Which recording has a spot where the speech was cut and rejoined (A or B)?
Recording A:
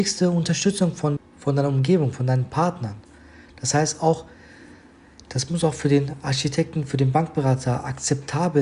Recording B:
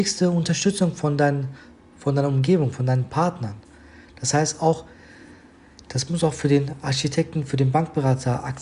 A